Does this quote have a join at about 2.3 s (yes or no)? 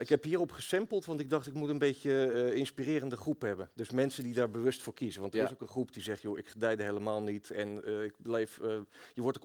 no